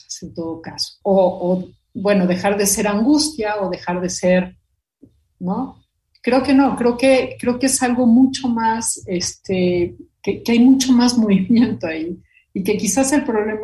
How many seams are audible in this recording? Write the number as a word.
one